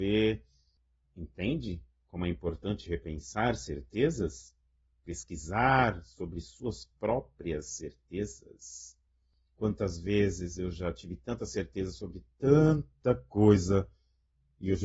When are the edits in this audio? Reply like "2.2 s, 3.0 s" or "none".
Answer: none